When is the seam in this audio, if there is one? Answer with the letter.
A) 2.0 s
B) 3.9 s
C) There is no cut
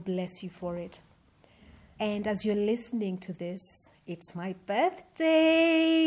A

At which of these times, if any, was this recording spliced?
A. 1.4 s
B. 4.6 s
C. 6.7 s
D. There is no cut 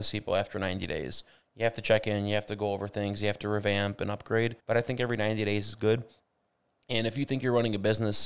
B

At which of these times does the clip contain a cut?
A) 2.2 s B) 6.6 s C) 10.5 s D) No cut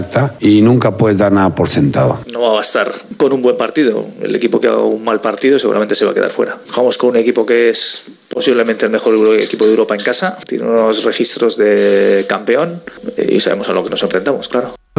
A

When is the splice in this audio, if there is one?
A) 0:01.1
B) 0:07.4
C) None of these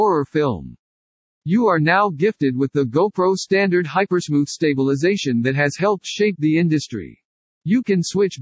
B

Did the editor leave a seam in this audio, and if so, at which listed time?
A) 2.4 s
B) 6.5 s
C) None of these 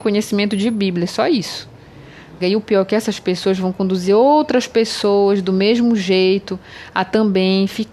A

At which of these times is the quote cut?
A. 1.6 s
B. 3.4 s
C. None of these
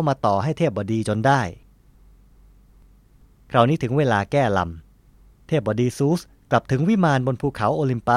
C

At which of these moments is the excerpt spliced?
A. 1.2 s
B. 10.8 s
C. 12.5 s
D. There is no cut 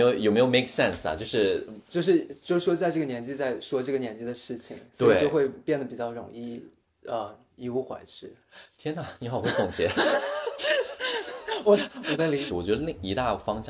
C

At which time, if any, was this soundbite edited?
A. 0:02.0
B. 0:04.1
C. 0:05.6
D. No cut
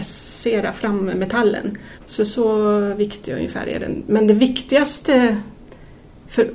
A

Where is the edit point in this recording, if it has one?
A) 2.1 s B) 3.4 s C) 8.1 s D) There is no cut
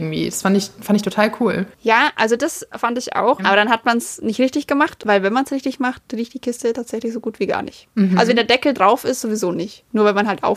B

